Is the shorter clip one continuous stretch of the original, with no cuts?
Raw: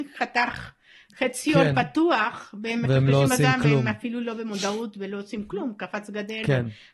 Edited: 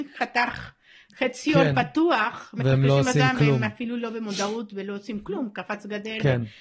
no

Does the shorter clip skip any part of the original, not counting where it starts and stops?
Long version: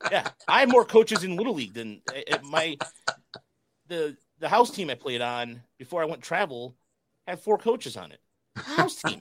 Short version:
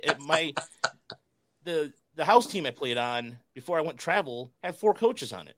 yes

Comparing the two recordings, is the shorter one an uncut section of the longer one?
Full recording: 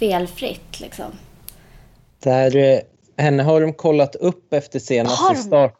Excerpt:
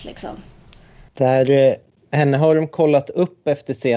no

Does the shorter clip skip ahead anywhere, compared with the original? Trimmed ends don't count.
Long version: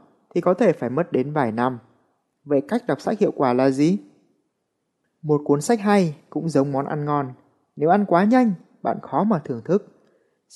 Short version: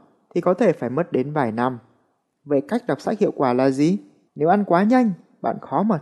yes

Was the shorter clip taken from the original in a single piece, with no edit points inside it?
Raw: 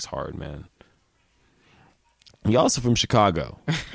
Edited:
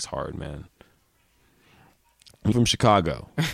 no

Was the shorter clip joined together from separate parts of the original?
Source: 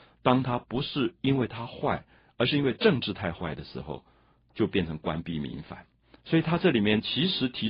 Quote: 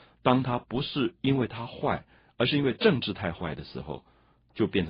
no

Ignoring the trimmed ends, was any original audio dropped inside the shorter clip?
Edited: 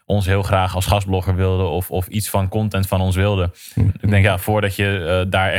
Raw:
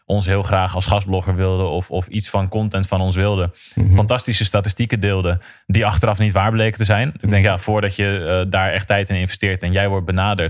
yes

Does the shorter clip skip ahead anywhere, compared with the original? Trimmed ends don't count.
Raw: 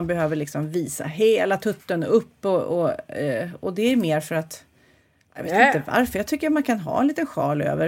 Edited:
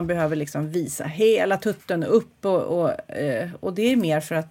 no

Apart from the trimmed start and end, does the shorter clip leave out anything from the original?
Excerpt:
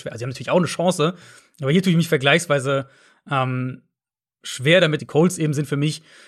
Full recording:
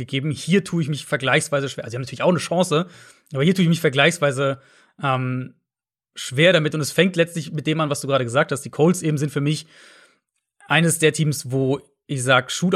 yes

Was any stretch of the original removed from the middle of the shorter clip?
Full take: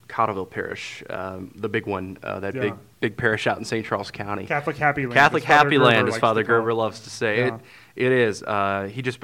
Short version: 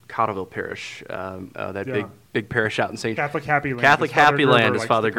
yes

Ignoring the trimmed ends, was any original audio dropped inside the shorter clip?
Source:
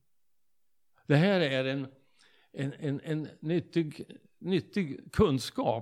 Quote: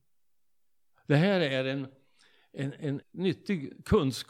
yes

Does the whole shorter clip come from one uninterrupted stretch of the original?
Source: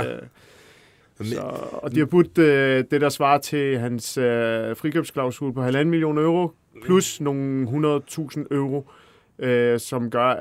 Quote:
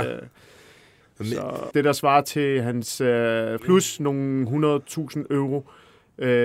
no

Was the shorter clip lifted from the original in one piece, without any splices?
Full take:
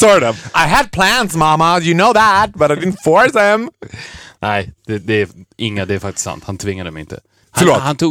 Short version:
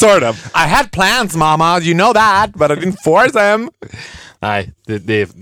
yes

